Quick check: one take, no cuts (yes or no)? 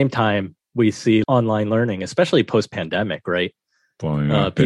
no